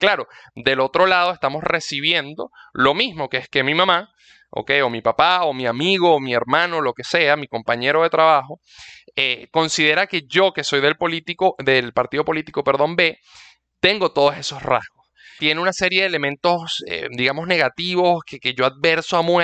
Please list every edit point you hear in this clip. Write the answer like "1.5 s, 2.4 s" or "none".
15.4 s